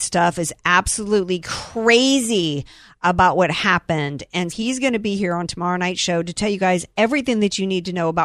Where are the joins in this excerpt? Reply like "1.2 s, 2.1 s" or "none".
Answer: 4.5 s